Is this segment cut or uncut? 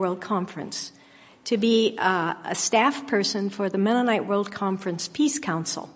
uncut